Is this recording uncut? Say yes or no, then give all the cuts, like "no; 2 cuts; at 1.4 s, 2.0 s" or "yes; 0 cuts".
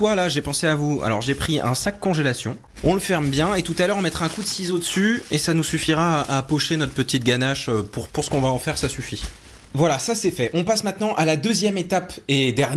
yes; 0 cuts